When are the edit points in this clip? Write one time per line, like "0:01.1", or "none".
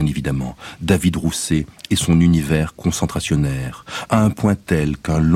none